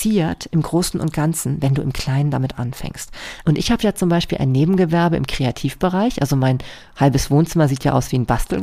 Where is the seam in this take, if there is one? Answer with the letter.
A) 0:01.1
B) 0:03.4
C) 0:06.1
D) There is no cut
B